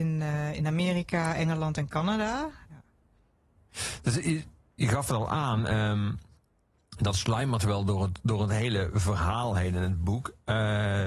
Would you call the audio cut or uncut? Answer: cut